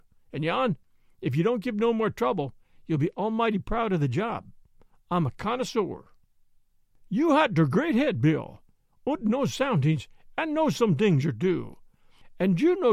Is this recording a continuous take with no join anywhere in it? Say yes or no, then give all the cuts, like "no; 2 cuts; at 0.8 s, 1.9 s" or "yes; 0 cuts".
yes; 0 cuts